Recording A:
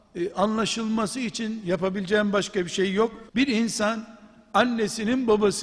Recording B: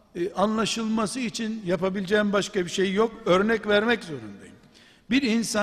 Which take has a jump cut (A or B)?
A